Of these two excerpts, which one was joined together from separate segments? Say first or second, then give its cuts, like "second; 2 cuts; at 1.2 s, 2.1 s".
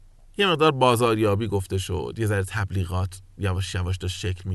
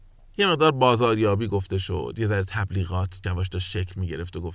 second; 1 cut; at 3.2 s